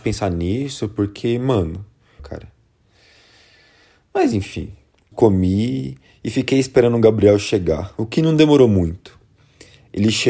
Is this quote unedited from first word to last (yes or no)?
no